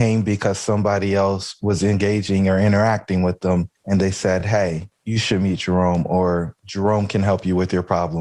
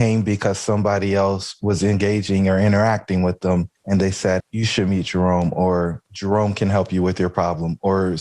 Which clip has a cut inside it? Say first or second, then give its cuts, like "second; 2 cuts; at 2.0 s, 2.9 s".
second; 1 cut; at 4.4 s